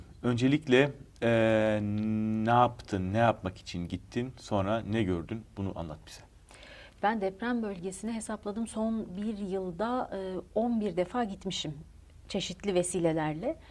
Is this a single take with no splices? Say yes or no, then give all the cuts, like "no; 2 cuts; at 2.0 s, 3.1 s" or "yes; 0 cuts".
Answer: yes; 0 cuts